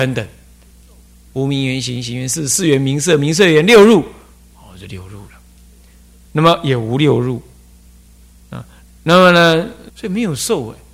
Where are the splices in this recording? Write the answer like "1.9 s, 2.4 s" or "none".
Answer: 8.8 s, 9.9 s